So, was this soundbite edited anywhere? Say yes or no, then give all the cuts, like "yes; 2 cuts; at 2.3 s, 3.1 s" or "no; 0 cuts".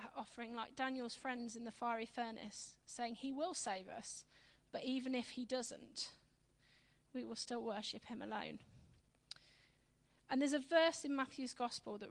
no; 0 cuts